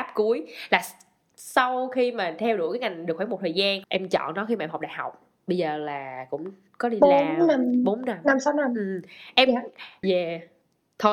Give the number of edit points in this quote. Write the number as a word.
two